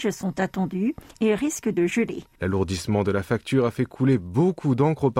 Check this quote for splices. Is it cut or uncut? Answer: cut